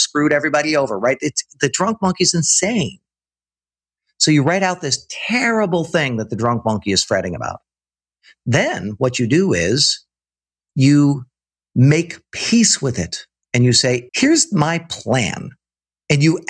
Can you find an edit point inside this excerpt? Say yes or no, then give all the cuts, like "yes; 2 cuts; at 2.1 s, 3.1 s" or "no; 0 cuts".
yes; 1 cut; at 14.1 s